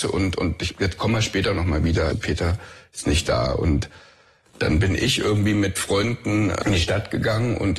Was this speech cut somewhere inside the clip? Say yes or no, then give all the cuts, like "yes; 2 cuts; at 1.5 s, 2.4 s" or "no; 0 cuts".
yes; 1 cut; at 2.1 s